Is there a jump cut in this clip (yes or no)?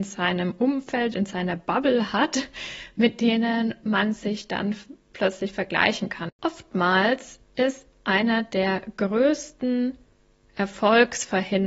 yes